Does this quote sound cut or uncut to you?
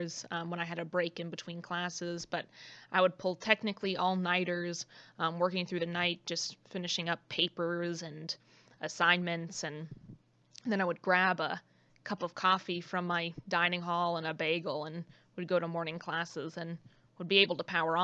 uncut